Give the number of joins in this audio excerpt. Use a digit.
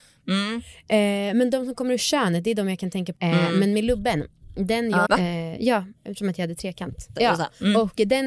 3